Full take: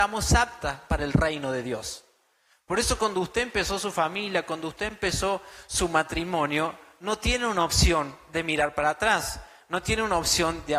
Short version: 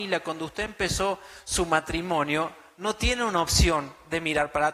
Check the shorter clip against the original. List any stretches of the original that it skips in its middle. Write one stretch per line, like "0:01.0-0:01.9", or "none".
none